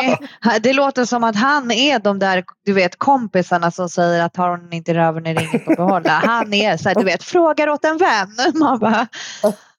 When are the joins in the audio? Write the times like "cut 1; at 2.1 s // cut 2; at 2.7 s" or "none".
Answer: none

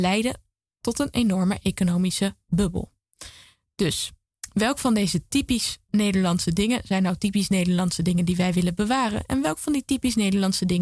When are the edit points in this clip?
none

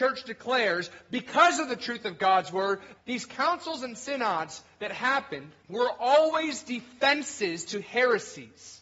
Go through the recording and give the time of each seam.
cut 1; at 2.9 s // cut 2; at 5.6 s

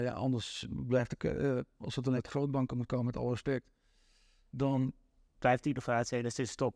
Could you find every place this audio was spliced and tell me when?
cut 1; at 2.2 s

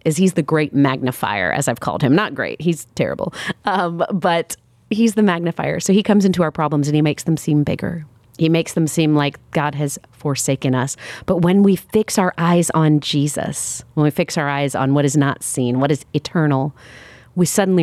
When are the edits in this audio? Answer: none

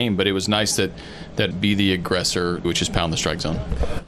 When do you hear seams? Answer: cut 1; at 1.5 s // cut 2; at 2.6 s

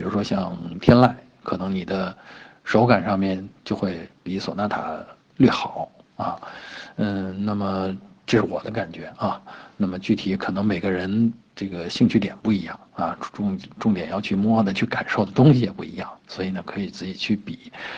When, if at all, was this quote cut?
none

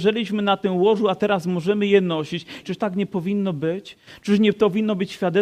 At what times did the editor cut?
cut 1; at 2.6 s

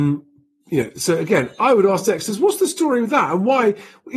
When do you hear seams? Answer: none

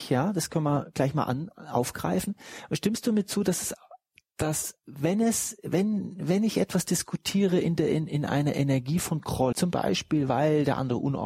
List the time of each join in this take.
cut 1; at 8.1 s // cut 2; at 9.5 s

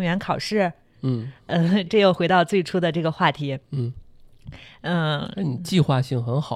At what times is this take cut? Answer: cut 1; at 1.9 s

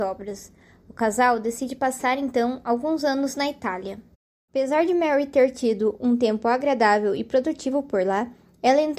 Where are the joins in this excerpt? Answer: none

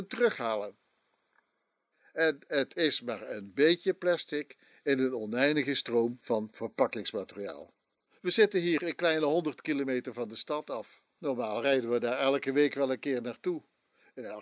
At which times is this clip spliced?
cut 1; at 8.1 s

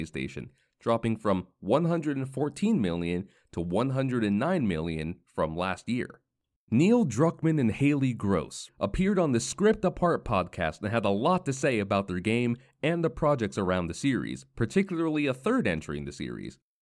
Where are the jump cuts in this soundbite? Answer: cut 1; at 6.6 s // cut 2; at 8.7 s

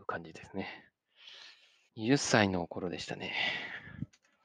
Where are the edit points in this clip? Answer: cut 1; at 1.9 s

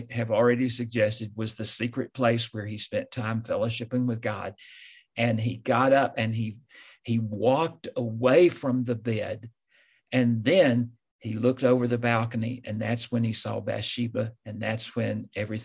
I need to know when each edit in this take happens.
none

